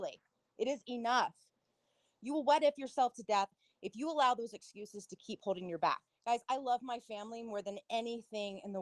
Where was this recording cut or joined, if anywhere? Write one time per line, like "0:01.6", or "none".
0:06.1